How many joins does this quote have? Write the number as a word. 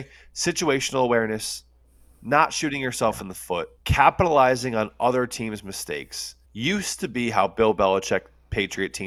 two